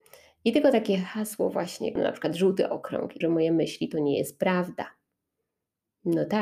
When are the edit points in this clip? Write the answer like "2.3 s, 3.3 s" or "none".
2.0 s, 3.2 s